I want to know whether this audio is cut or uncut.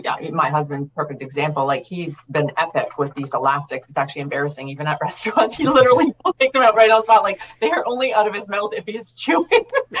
uncut